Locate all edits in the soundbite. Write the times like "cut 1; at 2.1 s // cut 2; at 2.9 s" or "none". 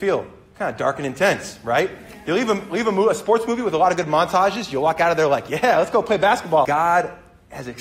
cut 1; at 6.6 s